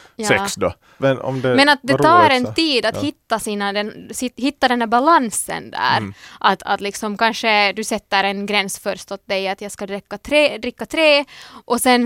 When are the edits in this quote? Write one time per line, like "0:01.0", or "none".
0:01.0

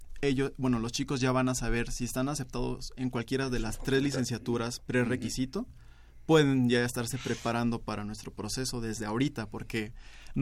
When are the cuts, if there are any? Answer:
none

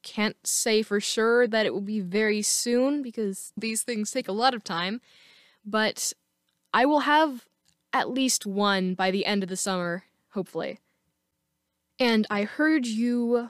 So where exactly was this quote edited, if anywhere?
0:03.6

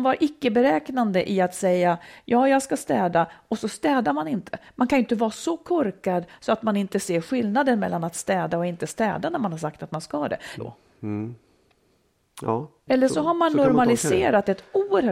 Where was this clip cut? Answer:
0:10.6
0:12.9

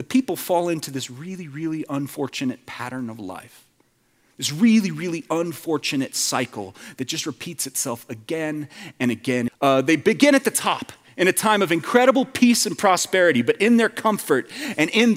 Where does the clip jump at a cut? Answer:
0:09.5

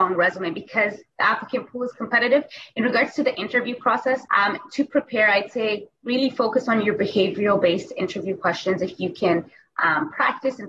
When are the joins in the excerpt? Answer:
0:04.3

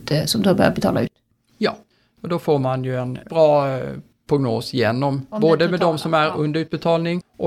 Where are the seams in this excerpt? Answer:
0:05.3

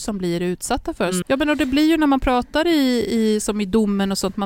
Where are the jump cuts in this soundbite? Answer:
0:01.2

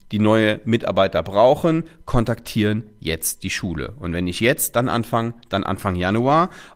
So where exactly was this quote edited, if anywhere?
none

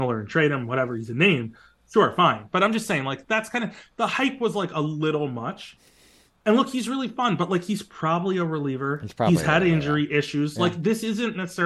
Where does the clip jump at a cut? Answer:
none

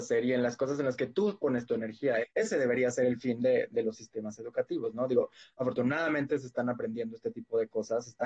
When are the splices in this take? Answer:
0:02.2

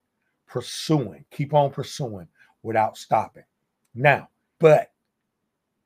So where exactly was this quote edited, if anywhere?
0:04.6

